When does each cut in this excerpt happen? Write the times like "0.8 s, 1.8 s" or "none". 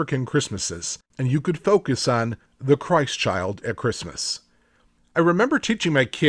1.1 s, 5.0 s